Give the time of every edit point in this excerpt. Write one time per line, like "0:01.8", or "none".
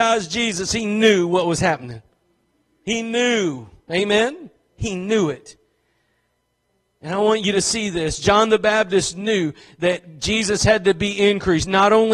none